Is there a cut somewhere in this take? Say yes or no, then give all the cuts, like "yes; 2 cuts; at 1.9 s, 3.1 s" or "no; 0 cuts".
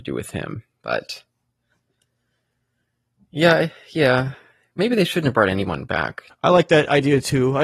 yes; 1 cut; at 6.3 s